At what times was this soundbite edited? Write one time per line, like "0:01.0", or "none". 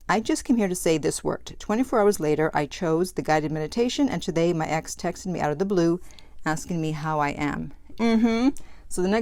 0:07.9